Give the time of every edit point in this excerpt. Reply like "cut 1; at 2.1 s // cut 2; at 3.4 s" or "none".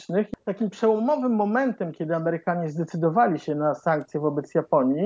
none